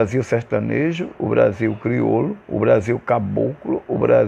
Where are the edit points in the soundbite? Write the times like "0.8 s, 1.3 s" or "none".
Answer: 2.4 s